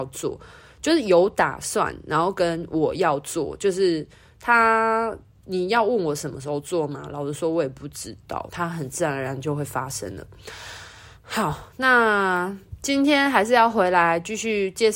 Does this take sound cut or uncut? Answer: cut